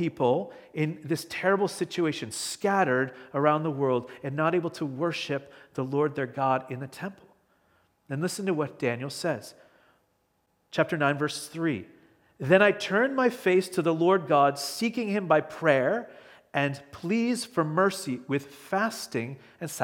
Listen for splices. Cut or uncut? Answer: uncut